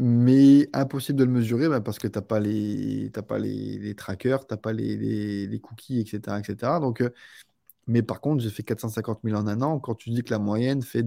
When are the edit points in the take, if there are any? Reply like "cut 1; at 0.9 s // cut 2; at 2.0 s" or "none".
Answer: none